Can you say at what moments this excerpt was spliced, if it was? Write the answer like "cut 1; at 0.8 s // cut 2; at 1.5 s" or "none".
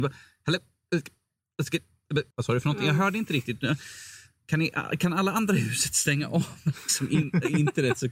cut 1; at 2.3 s